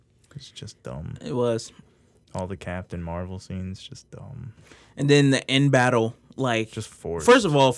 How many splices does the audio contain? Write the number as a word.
zero